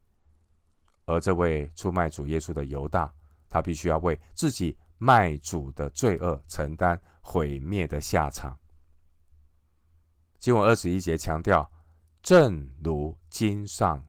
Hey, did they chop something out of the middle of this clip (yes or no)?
no